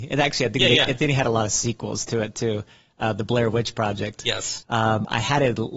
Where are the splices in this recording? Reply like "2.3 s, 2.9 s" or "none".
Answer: 4.6 s